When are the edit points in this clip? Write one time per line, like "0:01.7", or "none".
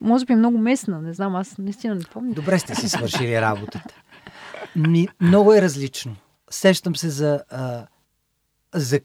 0:02.3

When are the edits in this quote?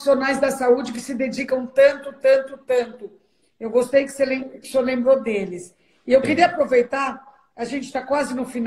none

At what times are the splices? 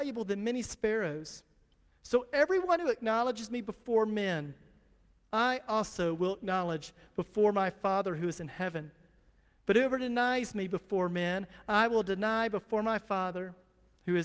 none

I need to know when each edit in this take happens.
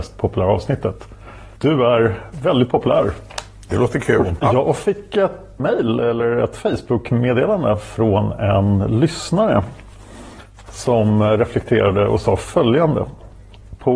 0:01.6
0:04.4
0:05.6

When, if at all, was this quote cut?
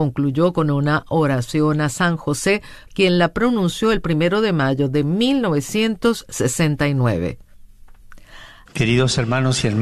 0:02.9
0:08.7

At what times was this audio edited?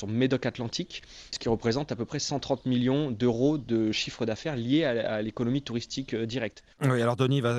0:01.3

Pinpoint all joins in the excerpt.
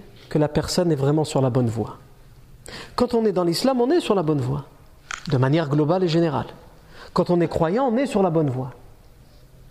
none

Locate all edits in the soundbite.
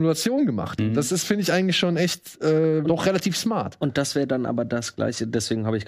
0:02.8

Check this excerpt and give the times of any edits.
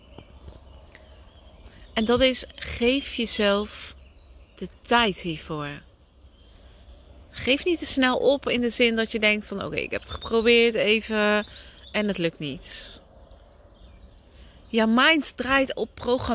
none

